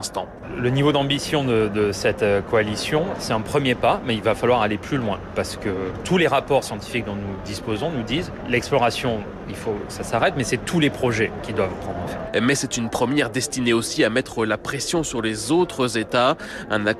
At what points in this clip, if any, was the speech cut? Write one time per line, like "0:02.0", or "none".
none